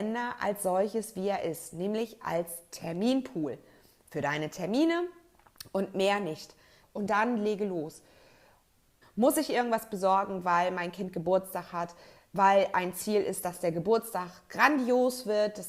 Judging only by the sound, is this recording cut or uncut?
cut